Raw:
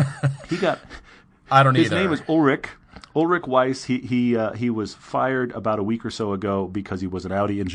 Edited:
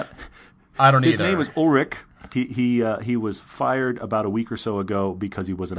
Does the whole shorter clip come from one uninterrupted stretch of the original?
no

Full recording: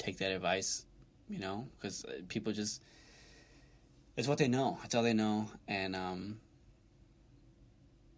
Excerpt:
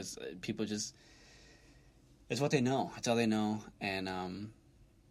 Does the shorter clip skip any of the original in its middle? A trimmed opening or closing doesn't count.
no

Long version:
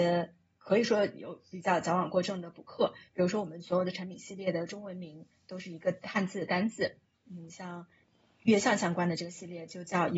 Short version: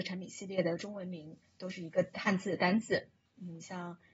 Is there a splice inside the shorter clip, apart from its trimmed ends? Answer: no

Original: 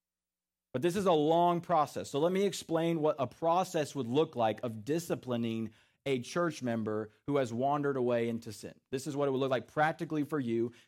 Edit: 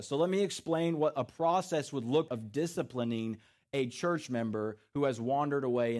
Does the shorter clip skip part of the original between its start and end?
yes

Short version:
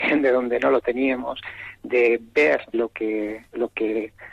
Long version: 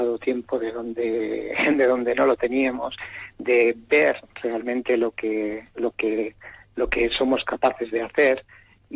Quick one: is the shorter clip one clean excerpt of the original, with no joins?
no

